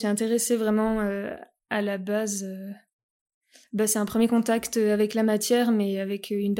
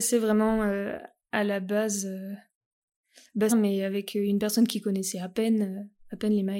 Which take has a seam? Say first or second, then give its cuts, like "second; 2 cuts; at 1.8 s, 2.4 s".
second; 1 cut; at 3.5 s